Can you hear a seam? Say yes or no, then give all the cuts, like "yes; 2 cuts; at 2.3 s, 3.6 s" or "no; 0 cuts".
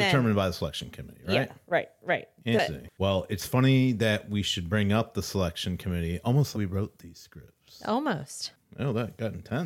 yes; 2 cuts; at 6.5 s, 8.6 s